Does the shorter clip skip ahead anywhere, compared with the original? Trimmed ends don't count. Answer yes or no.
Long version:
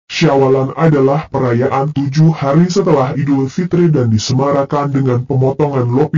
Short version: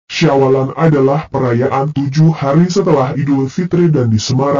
no